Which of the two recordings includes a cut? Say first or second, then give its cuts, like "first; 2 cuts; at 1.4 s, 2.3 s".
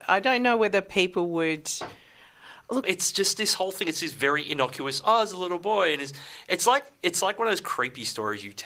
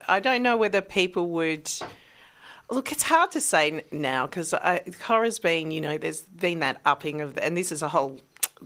first; 1 cut; at 2.8 s